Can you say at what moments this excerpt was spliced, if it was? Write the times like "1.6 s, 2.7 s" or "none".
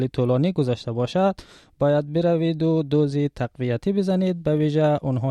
none